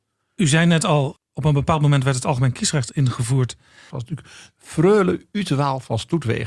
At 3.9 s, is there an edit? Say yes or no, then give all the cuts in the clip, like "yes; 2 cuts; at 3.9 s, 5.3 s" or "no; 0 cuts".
yes; 1 cut; at 3.9 s